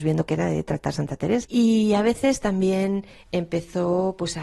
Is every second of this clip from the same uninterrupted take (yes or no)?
no